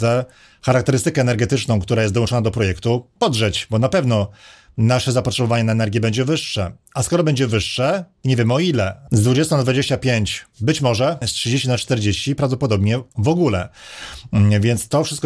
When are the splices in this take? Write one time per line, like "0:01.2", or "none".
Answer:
0:09.1
0:11.2